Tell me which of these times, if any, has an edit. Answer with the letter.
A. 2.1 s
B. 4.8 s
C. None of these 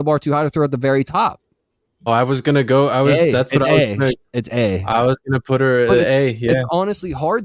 A